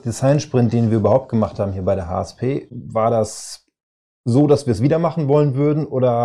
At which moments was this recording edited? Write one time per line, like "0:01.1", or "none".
0:02.7